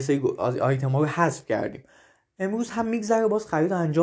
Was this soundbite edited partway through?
no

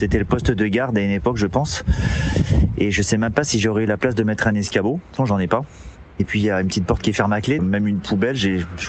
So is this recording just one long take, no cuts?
no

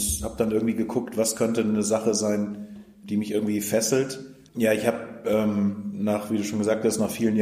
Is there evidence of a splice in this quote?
yes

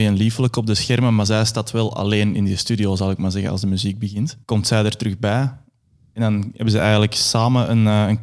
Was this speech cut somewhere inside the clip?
yes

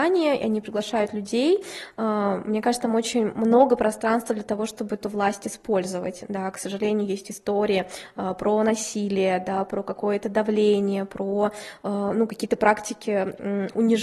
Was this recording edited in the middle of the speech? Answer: no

